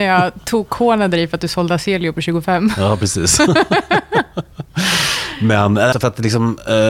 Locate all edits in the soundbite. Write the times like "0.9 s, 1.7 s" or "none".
5.9 s